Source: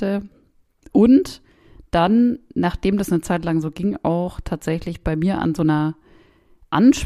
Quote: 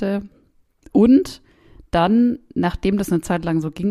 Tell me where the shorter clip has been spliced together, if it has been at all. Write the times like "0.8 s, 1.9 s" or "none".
none